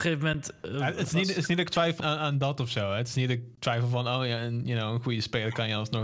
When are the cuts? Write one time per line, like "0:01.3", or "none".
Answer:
0:02.0